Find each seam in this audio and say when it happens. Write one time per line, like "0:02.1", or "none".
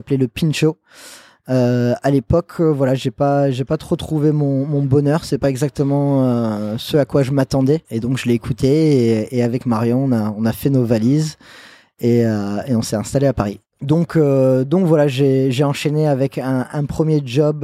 0:07.8